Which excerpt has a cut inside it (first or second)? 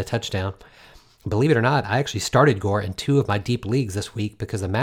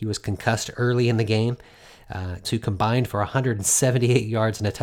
second